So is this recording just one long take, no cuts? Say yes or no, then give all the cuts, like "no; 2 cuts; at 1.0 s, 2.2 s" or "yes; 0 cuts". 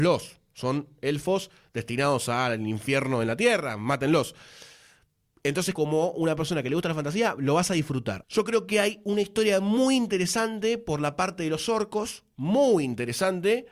no; 2 cuts; at 5.8 s, 8.2 s